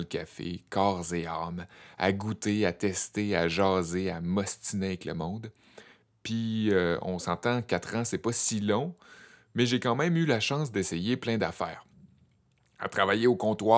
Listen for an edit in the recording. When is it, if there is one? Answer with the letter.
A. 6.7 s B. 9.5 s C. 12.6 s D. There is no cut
D